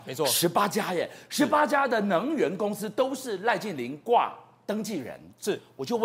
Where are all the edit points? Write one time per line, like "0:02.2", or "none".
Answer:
none